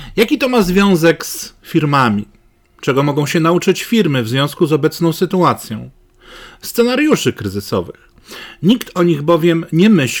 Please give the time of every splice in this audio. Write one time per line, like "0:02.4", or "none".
none